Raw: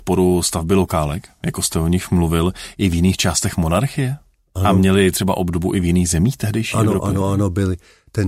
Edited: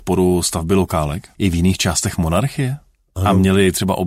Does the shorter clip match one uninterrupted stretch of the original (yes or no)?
no